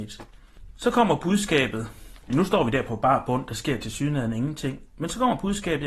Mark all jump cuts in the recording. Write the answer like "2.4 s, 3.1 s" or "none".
2.3 s